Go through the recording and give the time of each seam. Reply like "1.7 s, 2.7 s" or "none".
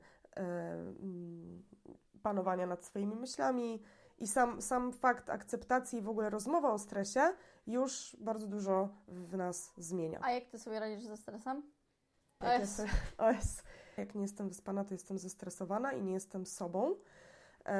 12.4 s, 14.0 s